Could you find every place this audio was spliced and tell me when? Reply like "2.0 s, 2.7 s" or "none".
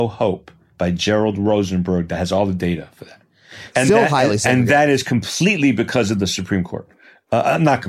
3.7 s

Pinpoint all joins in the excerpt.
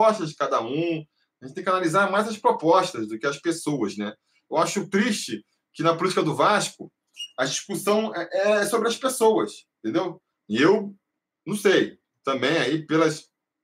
10.4 s

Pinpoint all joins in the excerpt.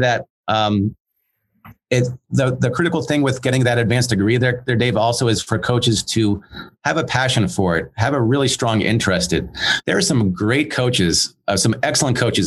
9.8 s

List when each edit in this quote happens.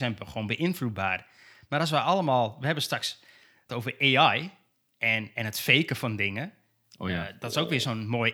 3.7 s

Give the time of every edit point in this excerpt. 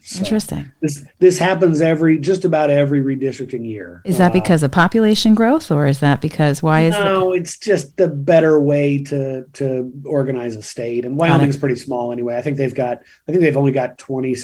none

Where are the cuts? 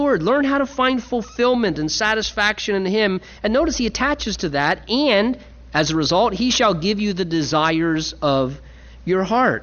none

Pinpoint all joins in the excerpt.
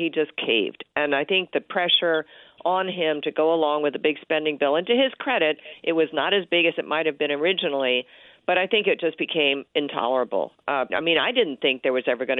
10.9 s

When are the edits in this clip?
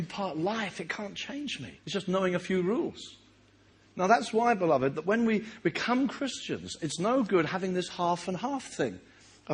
1.8 s

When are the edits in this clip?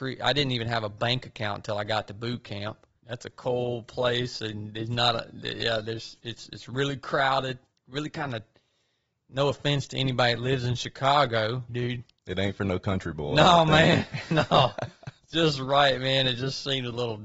3.0 s, 11.7 s

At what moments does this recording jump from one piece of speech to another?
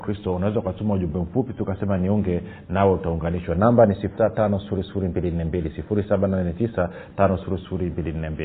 4.2 s

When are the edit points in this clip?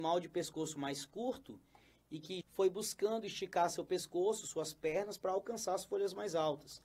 2.4 s

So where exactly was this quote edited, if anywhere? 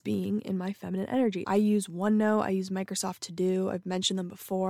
1.4 s

